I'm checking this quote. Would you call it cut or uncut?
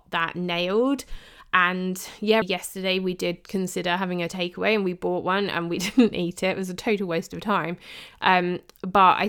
cut